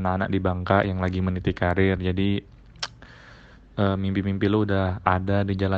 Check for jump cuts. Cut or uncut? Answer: uncut